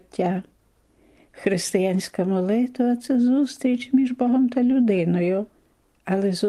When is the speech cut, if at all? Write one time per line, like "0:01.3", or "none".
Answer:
none